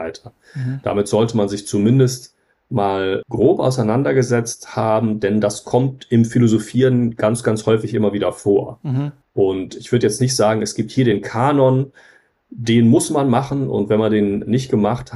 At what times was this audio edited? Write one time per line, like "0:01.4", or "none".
none